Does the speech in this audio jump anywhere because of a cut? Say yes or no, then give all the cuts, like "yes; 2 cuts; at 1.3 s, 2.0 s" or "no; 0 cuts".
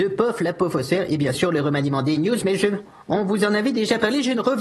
no; 0 cuts